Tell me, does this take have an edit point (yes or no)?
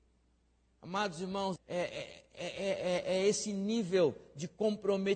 yes